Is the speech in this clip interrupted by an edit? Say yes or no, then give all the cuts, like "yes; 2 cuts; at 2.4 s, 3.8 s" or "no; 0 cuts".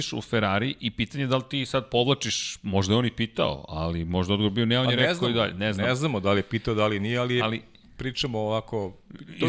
no; 0 cuts